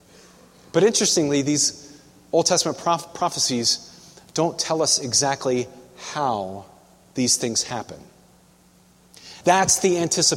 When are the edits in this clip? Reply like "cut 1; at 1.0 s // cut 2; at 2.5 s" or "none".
cut 1; at 9.4 s

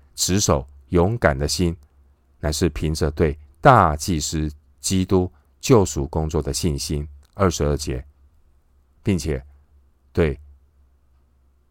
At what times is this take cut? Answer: none

